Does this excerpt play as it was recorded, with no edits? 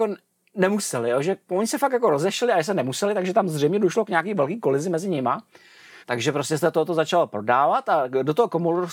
no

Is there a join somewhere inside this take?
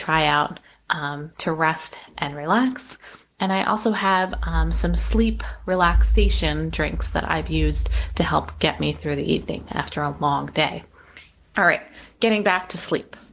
yes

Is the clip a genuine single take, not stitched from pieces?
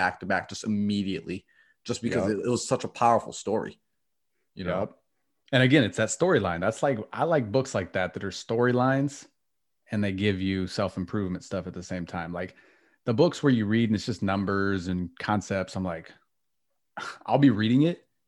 yes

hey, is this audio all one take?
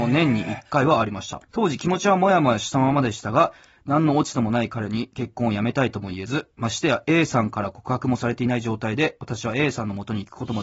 no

